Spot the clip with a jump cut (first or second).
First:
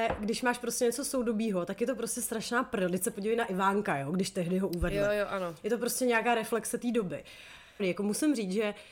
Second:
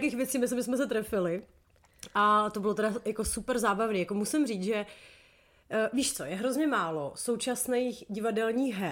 first